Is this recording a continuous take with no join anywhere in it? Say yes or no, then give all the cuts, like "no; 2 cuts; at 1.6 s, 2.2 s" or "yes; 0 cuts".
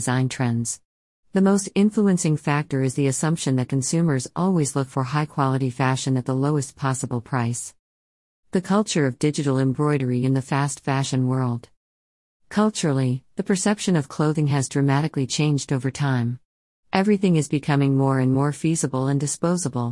yes; 0 cuts